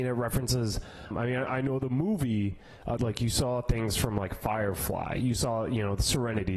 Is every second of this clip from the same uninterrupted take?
no; 2 cuts; at 1.1 s, 3.0 s

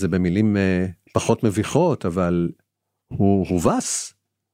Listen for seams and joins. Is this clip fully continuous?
yes; 0 cuts

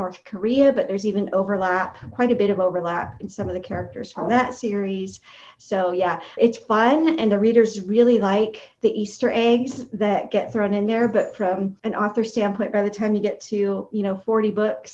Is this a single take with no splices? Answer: no; 1 cut; at 6.4 s

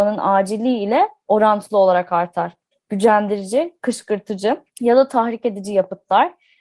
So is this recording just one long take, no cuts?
no; 2 cuts; at 2.7 s, 4.7 s

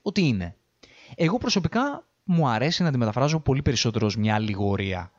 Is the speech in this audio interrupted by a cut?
no; 0 cuts

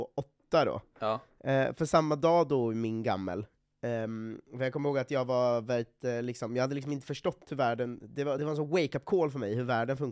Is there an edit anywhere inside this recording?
no; 0 cuts

